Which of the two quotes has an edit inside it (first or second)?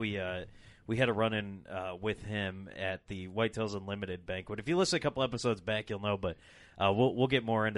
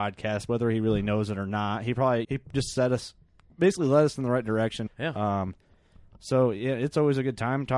second